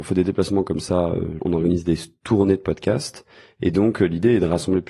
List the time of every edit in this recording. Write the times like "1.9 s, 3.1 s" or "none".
1.4 s

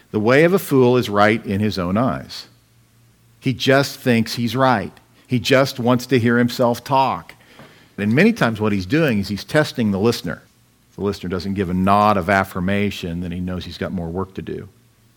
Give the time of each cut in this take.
8.0 s

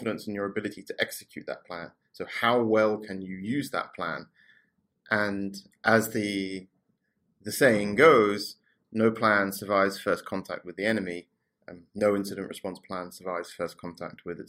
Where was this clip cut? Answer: none

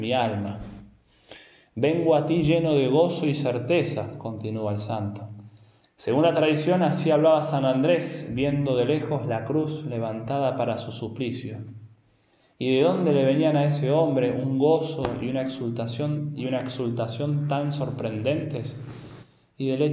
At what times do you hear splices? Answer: 5.8 s

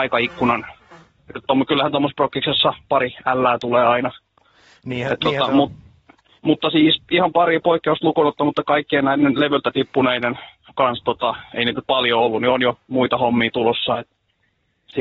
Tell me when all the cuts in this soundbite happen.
none

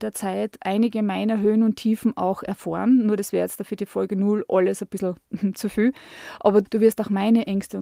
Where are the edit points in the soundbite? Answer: none

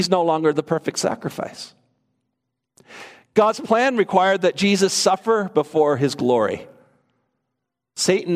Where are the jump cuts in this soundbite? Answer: none

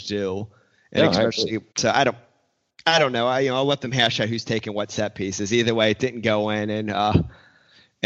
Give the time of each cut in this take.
1.7 s

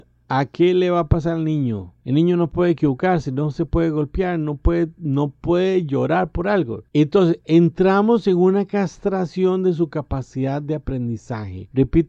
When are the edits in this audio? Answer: none

